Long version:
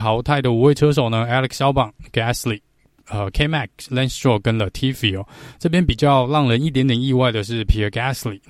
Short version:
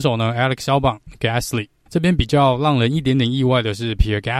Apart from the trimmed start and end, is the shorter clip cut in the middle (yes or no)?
yes